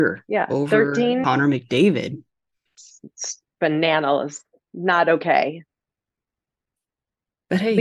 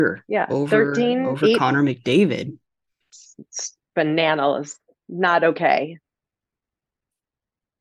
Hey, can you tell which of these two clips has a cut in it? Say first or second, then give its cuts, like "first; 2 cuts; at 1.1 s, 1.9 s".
first; 1 cut; at 1.2 s